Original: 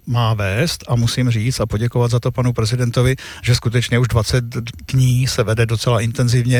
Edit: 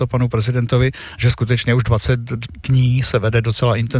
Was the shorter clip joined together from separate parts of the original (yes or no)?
no